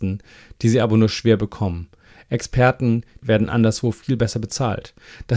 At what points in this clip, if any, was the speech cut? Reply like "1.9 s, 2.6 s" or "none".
3.2 s